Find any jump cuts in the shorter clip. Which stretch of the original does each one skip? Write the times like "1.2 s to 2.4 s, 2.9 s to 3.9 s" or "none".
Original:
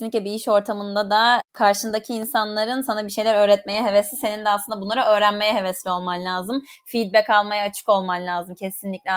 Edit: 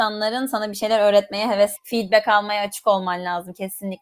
4.1 s to 6.8 s